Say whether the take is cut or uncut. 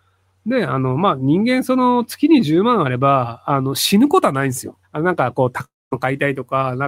cut